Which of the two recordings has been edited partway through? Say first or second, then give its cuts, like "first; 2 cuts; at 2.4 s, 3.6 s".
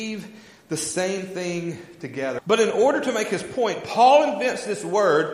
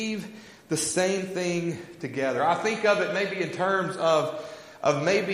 first; 1 cut; at 2.4 s